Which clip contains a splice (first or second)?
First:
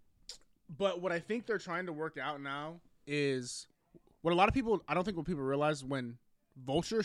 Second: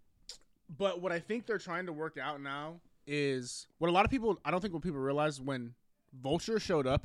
second